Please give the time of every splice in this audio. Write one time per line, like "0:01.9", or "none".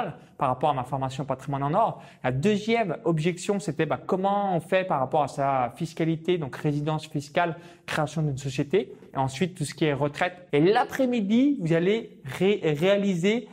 0:09.1
0:10.5